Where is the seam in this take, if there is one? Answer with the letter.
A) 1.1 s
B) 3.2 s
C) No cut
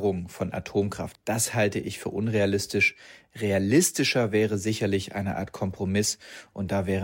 A